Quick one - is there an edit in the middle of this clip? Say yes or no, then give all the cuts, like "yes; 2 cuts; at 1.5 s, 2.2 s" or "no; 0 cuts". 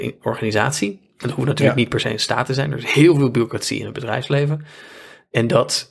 no; 0 cuts